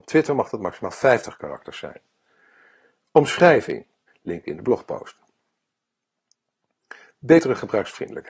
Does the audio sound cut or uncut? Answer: cut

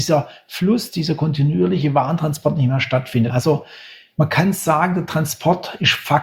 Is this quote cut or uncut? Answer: cut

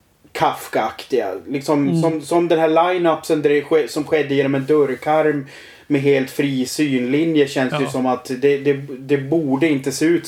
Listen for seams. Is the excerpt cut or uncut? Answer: uncut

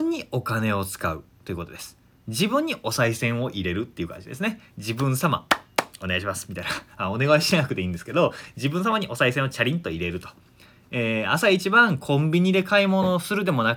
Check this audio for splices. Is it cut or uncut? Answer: uncut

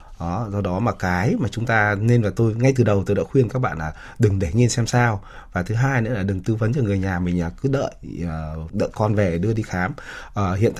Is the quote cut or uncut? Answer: cut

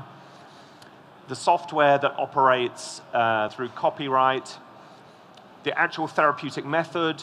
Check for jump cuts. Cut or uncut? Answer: cut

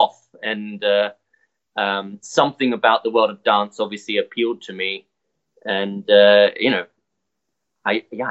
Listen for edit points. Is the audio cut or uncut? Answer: uncut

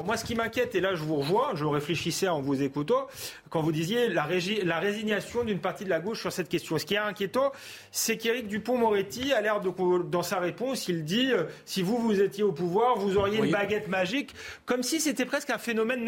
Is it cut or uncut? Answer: uncut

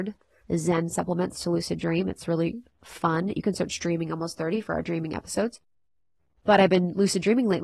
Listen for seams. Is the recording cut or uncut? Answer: uncut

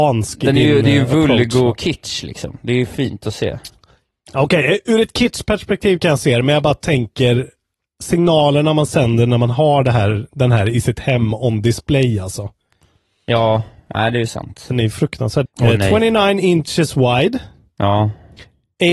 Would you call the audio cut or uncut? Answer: cut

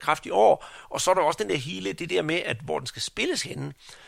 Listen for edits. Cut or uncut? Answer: uncut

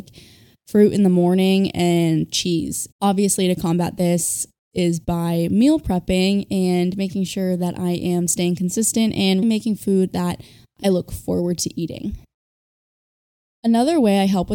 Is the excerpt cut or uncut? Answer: cut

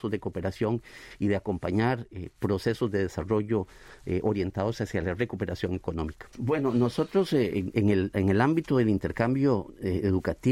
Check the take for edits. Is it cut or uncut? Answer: cut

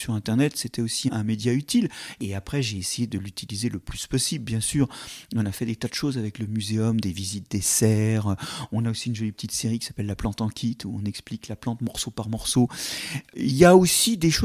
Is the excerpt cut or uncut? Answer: uncut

